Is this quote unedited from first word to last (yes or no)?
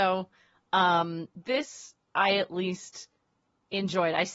yes